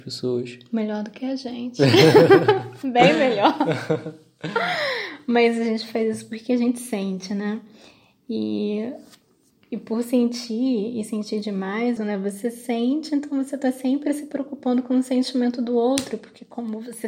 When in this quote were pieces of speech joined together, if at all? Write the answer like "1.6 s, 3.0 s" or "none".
12.0 s